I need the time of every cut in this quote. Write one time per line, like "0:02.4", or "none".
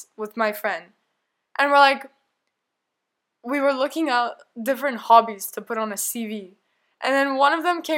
none